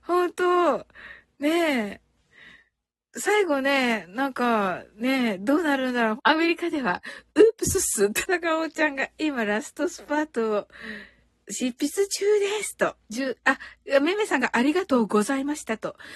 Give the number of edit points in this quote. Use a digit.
3